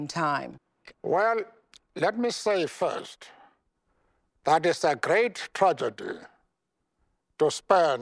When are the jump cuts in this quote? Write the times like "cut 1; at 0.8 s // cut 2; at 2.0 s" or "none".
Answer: cut 1; at 0.9 s